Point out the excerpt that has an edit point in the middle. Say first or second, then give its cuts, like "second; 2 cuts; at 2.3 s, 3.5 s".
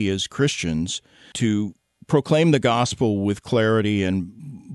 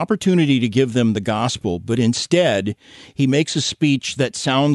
first; 1 cut; at 1.3 s